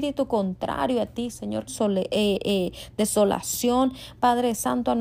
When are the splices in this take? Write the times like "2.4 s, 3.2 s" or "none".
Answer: 1.7 s